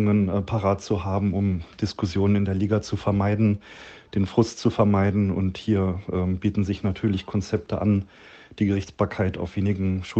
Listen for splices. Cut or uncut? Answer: uncut